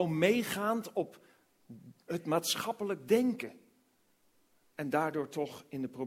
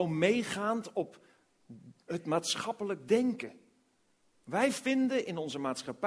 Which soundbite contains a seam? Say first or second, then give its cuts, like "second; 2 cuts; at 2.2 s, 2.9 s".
second; 1 cut; at 4.4 s